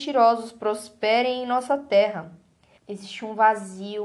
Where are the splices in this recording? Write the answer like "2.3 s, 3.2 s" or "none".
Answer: 2.8 s